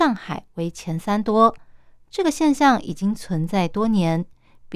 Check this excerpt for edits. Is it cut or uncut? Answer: uncut